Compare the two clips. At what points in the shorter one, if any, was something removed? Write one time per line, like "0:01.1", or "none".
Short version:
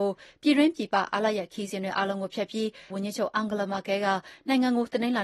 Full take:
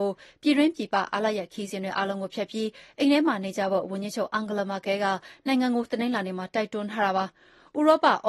0:02.9